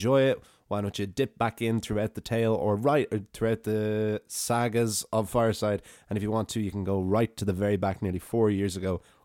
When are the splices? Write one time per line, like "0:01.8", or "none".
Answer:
none